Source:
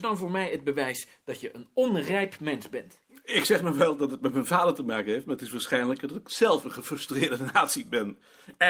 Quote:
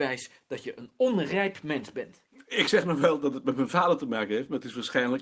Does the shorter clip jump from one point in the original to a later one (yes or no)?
no